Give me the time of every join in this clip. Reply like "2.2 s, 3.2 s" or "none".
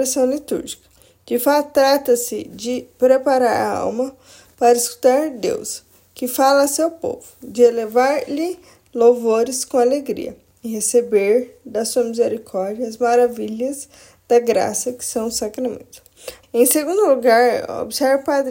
16.4 s